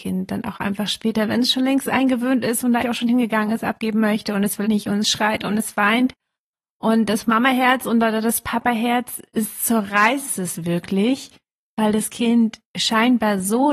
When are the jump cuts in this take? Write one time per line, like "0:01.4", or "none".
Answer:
0:02.8
0:04.7